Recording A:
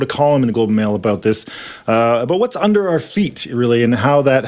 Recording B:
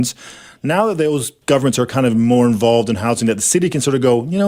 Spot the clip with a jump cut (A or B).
B